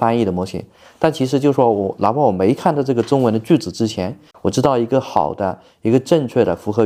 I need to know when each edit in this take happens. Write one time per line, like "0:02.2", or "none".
0:04.3